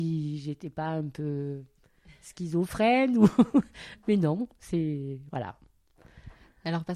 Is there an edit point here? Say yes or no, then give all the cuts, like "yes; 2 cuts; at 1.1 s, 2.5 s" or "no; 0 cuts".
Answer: no; 0 cuts